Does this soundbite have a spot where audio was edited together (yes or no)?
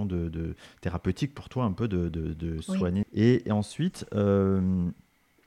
yes